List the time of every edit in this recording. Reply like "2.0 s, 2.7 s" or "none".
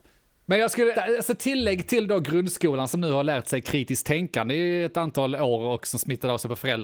0.9 s